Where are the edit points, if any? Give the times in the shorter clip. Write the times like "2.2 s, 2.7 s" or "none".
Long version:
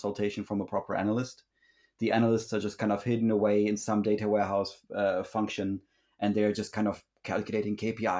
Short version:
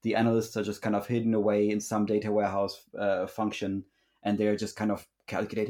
none

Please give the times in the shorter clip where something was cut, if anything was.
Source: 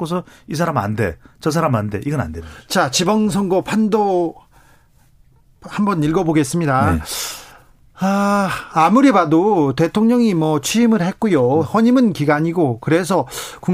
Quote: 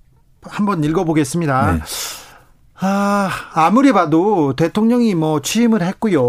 none

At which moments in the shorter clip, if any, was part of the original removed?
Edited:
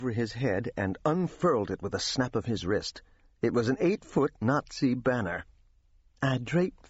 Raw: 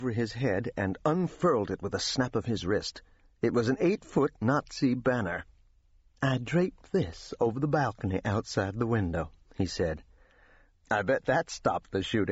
none

